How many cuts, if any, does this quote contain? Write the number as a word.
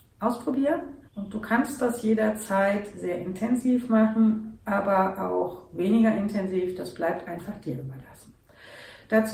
one